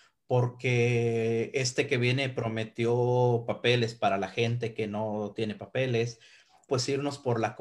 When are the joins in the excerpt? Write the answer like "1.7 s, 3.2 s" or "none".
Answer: 6.7 s